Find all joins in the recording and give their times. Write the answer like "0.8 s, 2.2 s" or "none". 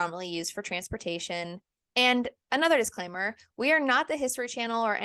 1.9 s